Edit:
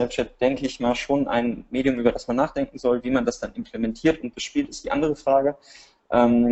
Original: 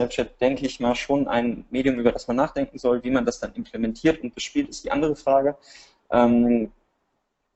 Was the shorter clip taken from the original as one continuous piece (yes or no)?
yes